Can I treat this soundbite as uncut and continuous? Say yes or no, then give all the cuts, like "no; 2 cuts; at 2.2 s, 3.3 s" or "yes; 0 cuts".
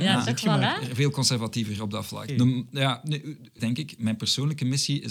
no; 2 cuts; at 2.3 s, 3.6 s